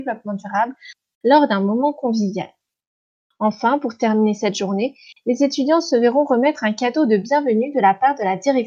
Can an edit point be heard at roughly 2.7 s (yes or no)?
no